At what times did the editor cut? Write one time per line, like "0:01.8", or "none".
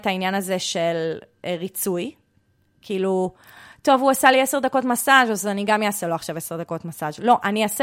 none